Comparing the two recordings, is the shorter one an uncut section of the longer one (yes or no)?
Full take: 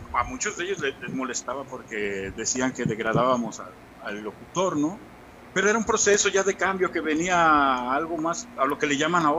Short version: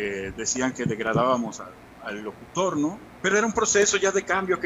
no